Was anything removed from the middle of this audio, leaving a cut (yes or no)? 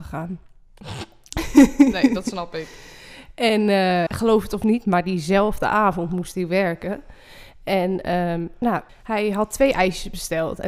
yes